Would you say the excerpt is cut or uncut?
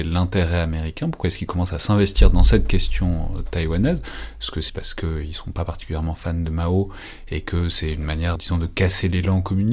cut